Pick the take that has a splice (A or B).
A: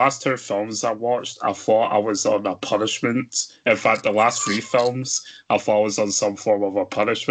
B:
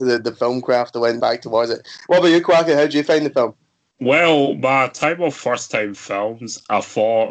B